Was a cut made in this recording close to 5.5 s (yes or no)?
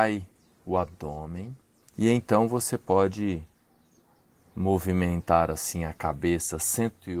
no